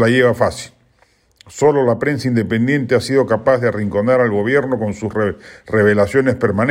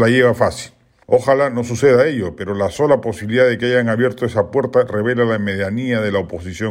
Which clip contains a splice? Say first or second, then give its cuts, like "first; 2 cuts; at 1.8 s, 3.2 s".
second; 1 cut; at 1.0 s